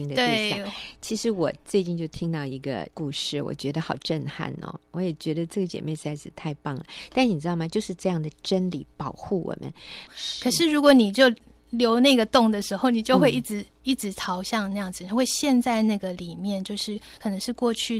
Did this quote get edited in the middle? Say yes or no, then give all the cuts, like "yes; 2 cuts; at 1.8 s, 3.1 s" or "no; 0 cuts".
yes; 1 cut; at 10.1 s